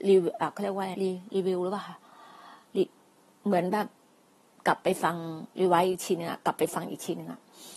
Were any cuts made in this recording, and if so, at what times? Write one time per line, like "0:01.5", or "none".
0:00.9